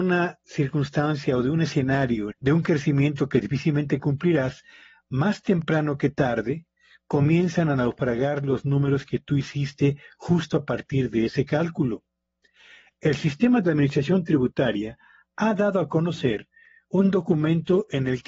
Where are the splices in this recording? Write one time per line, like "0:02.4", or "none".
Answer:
0:02.3